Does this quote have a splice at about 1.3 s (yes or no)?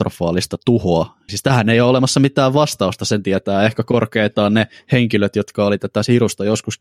yes